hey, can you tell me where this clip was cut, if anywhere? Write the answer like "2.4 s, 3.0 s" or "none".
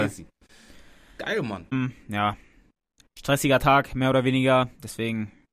1.7 s